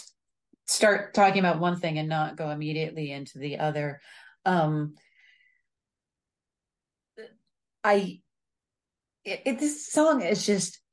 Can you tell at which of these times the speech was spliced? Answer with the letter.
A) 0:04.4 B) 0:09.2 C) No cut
C